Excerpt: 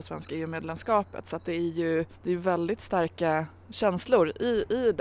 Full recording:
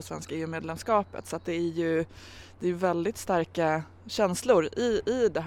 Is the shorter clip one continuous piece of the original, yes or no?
no